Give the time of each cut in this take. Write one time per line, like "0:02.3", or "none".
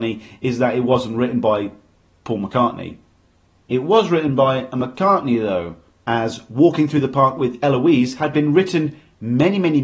none